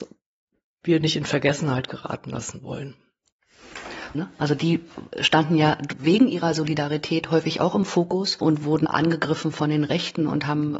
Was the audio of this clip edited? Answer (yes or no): yes